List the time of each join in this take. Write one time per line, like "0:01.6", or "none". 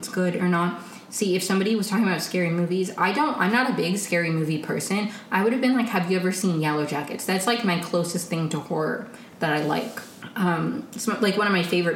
none